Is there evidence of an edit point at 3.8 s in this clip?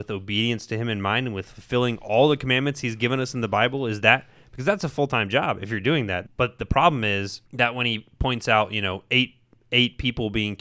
no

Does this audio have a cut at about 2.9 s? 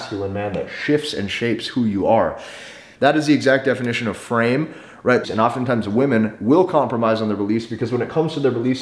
yes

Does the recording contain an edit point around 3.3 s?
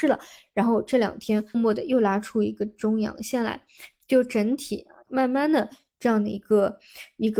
no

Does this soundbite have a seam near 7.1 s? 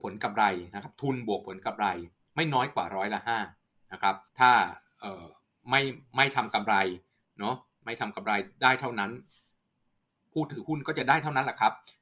no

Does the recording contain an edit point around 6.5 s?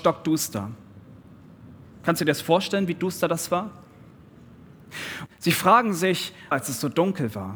yes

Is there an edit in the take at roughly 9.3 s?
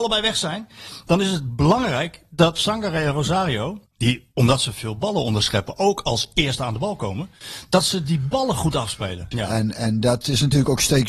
yes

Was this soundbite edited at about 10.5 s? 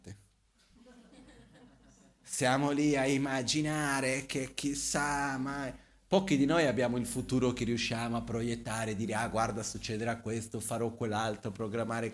no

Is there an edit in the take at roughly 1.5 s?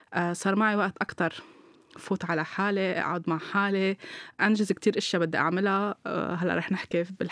no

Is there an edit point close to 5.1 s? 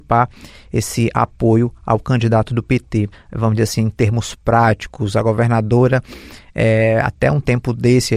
no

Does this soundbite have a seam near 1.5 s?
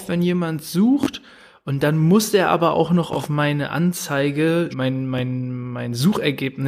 no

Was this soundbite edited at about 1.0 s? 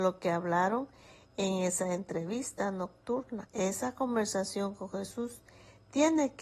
no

